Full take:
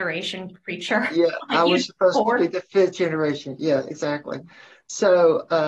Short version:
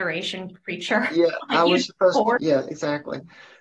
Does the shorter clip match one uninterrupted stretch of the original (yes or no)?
no